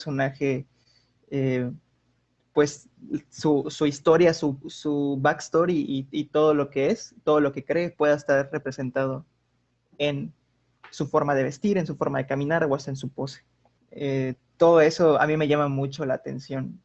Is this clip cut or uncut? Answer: cut